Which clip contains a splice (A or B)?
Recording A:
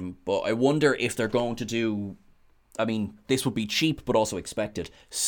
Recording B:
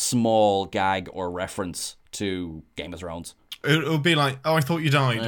B